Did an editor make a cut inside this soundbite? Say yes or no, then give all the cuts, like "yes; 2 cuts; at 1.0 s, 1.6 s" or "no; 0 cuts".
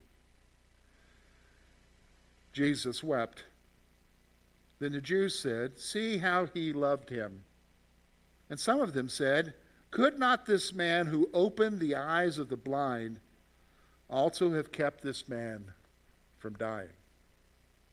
no; 0 cuts